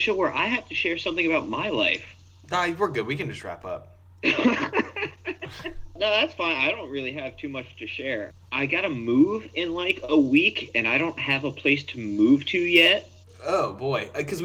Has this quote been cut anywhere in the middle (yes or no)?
no